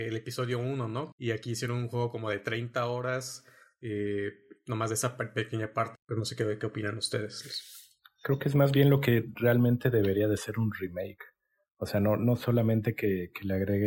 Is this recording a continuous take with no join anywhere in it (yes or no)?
no